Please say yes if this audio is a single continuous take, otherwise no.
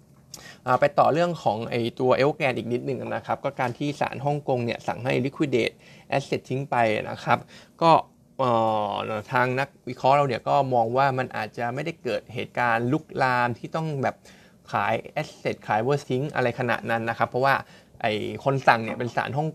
no